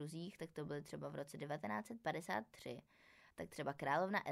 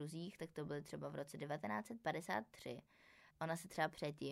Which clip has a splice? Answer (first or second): second